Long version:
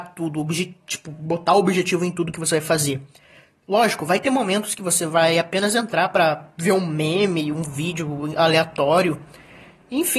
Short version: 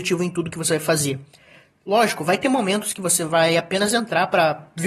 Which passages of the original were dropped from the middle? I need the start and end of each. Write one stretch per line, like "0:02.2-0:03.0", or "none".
none